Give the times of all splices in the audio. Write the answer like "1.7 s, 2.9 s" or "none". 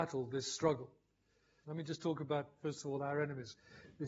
1.6 s